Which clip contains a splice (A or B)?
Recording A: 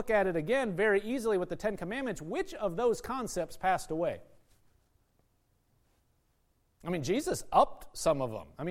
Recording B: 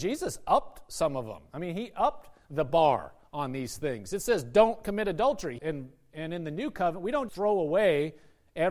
B